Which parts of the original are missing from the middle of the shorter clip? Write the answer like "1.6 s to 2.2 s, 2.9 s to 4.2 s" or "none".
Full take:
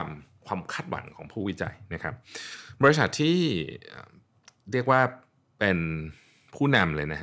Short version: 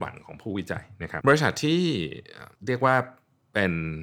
2.1 s to 2.8 s, 4.1 s to 4.6 s